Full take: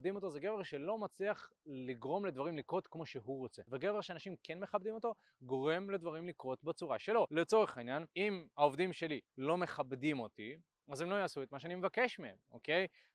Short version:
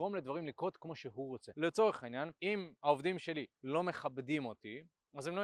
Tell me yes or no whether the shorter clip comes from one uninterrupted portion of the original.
no